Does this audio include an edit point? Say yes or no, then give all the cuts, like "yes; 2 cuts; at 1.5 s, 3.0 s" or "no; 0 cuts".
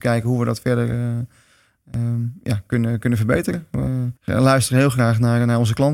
yes; 1 cut; at 4.2 s